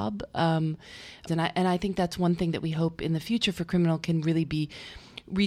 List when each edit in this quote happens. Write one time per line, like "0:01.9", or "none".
0:01.3